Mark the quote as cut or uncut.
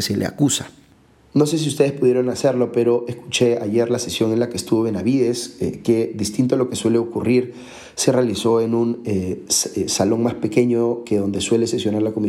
uncut